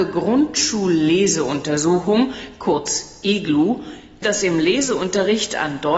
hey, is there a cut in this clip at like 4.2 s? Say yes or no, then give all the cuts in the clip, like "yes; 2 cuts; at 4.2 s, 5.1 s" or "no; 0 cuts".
yes; 1 cut; at 4.2 s